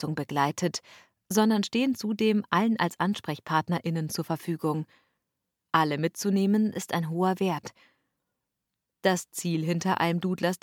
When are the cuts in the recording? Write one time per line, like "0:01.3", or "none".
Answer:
0:05.5